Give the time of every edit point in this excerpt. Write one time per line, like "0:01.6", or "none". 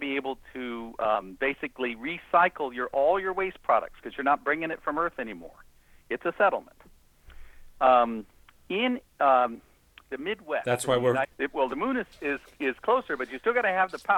0:11.2

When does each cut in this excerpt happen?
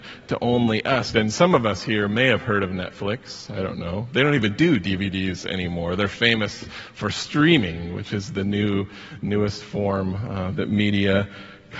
0:01.1

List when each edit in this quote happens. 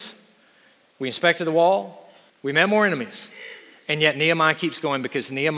0:02.3

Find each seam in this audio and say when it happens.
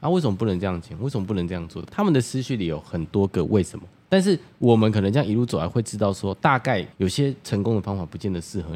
none

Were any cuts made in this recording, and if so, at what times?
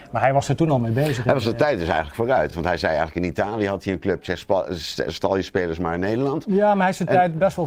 none

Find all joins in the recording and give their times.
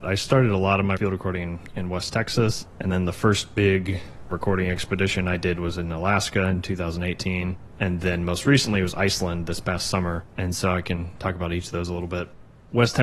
none

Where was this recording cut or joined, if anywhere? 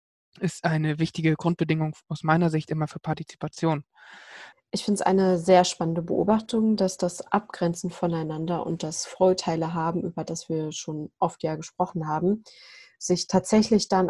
0:04.5

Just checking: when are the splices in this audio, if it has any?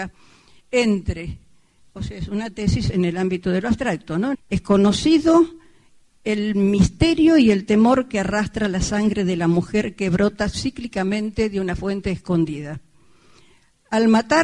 0:04.3

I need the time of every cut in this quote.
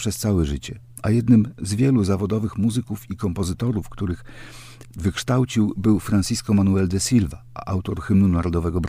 none

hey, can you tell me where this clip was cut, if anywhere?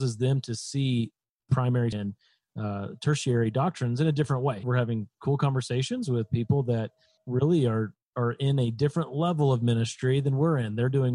0:01.9
0:04.6
0:07.2

